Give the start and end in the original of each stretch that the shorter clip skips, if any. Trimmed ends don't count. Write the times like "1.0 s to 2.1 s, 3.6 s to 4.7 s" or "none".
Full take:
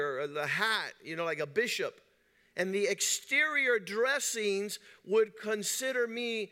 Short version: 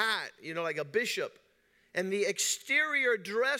none

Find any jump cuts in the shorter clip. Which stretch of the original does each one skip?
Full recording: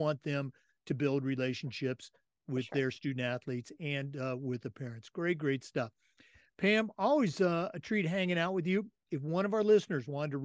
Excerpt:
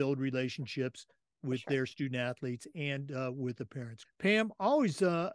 5.1 s to 6.4 s

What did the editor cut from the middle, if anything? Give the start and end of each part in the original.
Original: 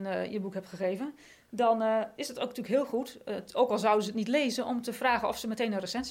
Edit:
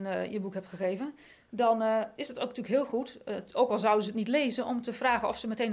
none

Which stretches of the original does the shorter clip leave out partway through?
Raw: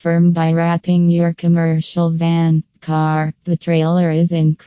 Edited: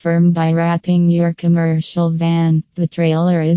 2.7 s to 3.4 s

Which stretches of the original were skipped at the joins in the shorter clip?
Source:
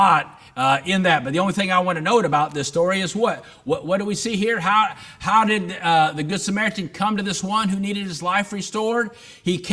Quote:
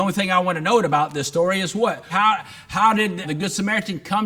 3.5 s to 4.6 s, 5.7 s to 6.1 s

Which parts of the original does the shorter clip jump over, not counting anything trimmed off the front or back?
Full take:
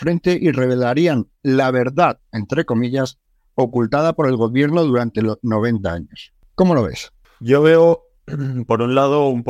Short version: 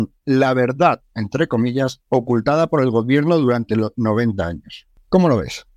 3.2 s to 3.5 s

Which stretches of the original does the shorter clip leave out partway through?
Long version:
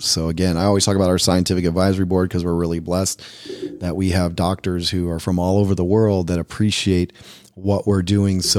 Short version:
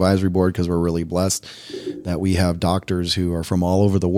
none

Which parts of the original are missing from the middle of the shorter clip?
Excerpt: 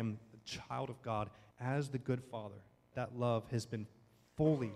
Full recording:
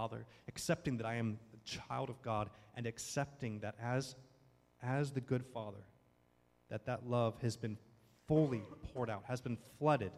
2.7 s to 4.7 s, 6.1 s to 6.8 s

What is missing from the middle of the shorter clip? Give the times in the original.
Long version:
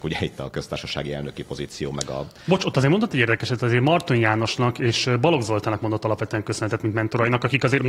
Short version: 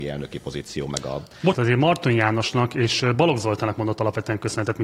2.6 s to 3.6 s

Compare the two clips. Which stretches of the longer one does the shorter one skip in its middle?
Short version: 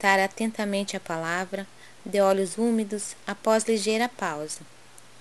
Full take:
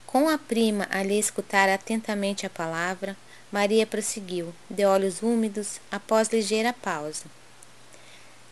3.5 s to 4.6 s

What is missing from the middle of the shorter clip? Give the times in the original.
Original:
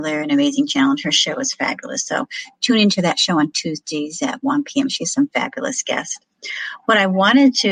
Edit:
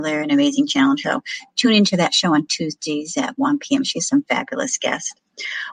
1.0 s to 2.1 s

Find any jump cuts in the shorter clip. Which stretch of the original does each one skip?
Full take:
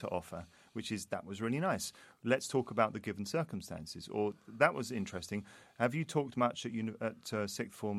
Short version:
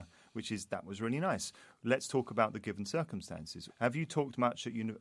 4.1 s to 5.7 s

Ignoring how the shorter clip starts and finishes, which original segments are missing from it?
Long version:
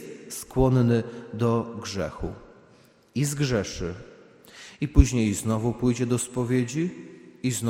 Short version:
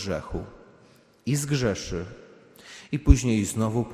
none

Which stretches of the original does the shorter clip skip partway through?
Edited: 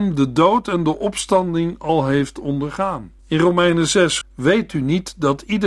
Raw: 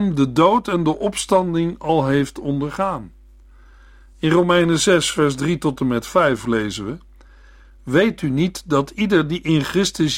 3.2 s to 4.1 s, 5.1 s to 7.7 s

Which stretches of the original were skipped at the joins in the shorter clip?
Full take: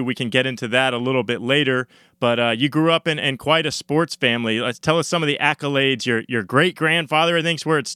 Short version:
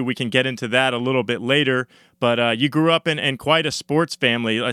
none

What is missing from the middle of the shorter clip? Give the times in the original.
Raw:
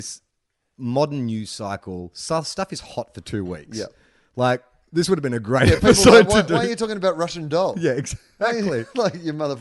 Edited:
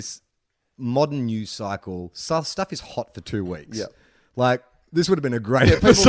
none

